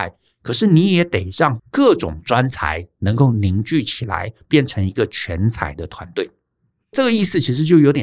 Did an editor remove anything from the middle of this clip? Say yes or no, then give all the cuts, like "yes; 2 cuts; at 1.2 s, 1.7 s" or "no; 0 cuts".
no; 0 cuts